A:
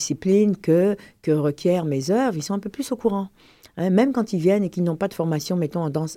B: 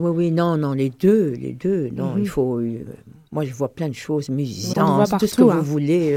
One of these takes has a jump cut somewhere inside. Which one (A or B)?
B